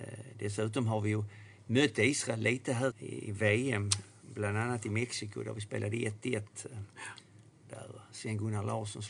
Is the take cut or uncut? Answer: cut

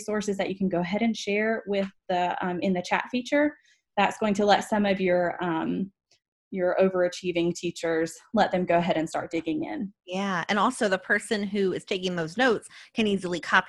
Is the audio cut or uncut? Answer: uncut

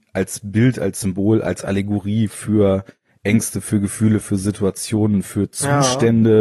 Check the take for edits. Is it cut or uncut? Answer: uncut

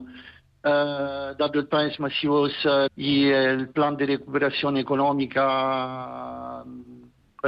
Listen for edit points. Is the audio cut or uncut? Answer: cut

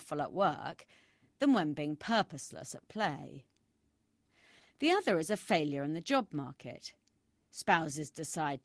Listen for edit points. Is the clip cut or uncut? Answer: uncut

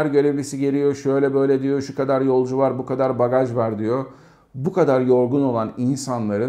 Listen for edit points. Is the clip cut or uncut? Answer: uncut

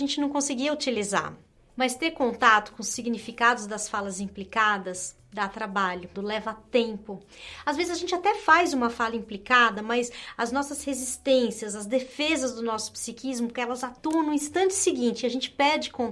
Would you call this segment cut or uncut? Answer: cut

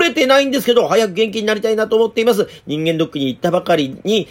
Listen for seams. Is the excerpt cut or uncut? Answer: uncut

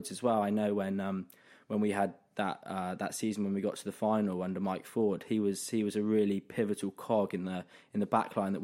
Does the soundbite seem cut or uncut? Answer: uncut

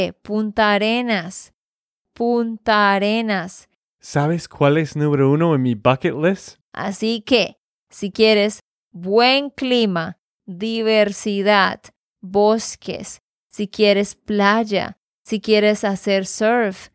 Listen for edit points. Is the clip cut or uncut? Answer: cut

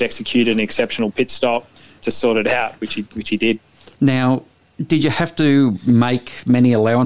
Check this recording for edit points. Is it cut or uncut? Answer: cut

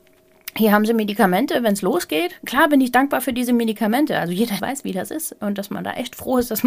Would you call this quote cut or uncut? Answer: cut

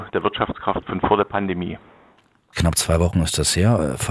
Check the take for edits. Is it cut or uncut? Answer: cut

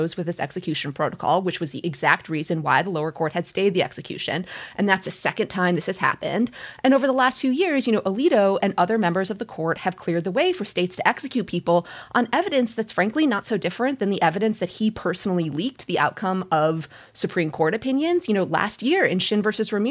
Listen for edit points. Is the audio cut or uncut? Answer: uncut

